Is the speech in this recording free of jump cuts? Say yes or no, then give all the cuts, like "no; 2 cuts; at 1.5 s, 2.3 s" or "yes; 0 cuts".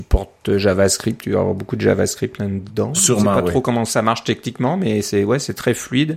yes; 0 cuts